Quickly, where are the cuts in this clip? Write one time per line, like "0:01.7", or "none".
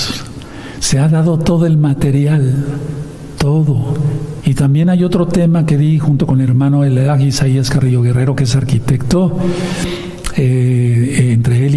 0:04.4